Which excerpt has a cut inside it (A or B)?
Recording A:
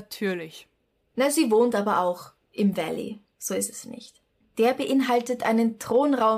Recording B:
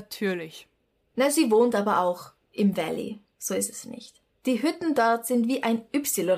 A